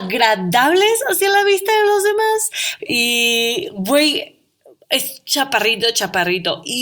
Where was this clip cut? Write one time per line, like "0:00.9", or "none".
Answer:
0:02.8